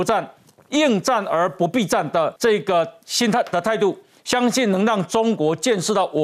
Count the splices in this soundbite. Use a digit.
1